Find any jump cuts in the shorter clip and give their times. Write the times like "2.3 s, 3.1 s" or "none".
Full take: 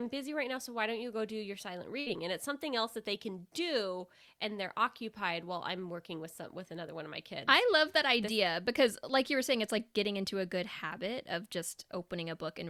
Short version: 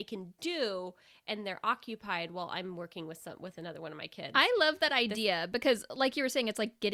none

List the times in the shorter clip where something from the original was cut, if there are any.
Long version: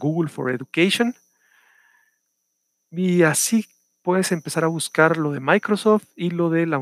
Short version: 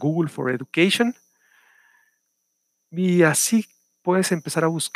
none

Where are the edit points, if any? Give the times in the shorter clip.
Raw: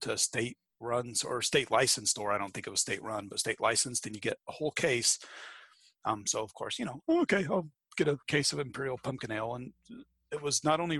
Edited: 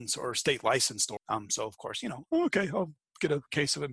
1.2 s

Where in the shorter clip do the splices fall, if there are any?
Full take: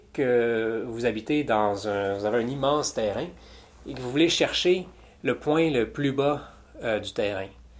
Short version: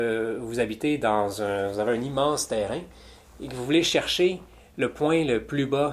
none

